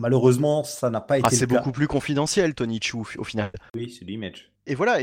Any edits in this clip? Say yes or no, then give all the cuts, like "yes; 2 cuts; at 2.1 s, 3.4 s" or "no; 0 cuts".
yes; 1 cut; at 3.7 s